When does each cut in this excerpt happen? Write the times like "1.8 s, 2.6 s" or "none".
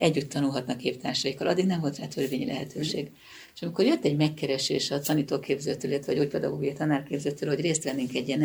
none